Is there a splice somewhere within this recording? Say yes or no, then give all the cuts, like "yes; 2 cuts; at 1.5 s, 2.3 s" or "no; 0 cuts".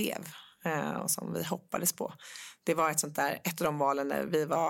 no; 0 cuts